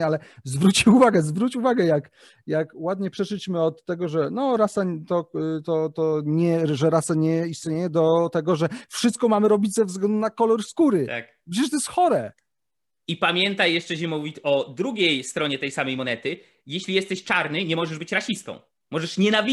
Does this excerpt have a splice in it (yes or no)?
no